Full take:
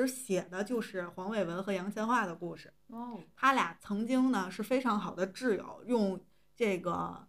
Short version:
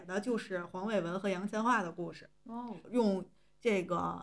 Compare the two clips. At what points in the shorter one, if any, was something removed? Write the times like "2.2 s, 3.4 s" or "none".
2.8 s